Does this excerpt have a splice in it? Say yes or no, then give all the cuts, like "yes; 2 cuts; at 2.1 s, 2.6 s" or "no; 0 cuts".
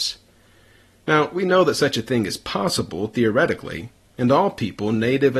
no; 0 cuts